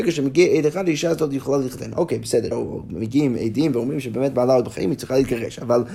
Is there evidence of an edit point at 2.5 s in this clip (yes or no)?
yes